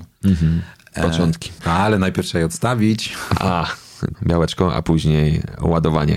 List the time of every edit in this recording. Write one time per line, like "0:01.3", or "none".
0:01.6
0:04.1